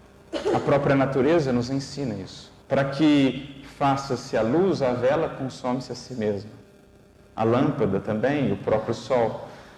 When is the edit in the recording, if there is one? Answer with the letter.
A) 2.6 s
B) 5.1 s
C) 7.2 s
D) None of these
A